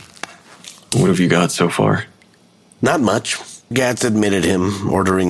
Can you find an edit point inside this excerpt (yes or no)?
yes